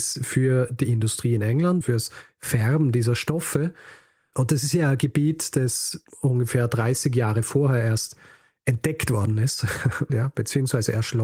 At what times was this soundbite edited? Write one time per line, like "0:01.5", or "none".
0:01.8
0:04.3
0:10.1